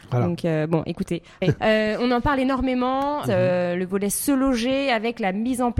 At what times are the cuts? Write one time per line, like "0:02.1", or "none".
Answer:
0:01.6
0:03.2